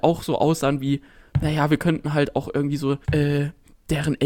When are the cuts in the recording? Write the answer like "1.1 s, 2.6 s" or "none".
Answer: 3.0 s